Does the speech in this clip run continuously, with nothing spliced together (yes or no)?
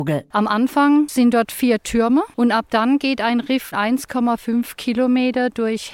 no